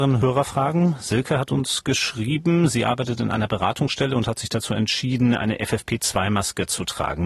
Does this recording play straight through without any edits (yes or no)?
yes